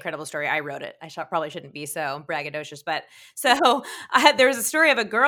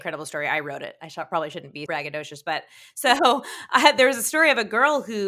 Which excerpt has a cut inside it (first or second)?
second